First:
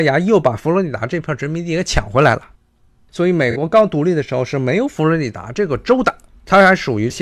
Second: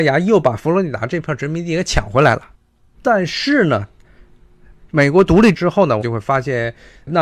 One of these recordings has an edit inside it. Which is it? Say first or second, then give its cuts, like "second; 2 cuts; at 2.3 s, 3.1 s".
second; 2 cuts; at 2.9 s, 6.0 s